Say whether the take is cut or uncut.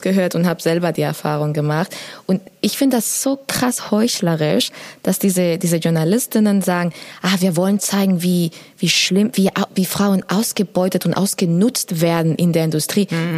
uncut